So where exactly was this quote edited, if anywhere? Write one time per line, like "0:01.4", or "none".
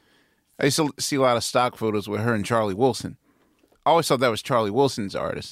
none